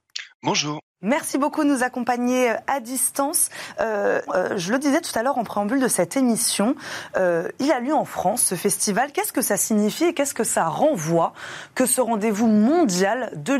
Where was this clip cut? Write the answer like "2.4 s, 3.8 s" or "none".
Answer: 4.3 s